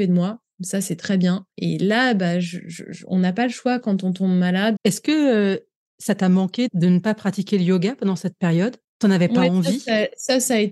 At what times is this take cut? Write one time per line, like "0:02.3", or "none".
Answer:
0:01.5
0:04.8